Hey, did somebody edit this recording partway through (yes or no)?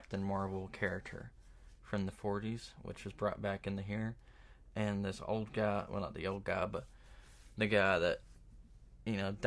no